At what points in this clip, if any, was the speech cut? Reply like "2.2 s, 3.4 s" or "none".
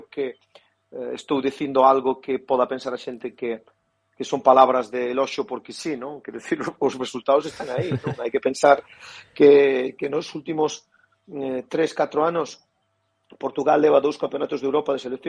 none